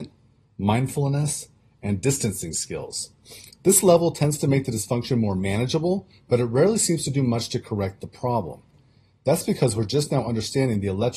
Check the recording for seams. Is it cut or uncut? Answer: uncut